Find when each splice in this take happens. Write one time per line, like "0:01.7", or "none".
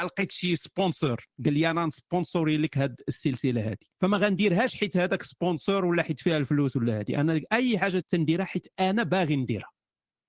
0:03.9
0:08.0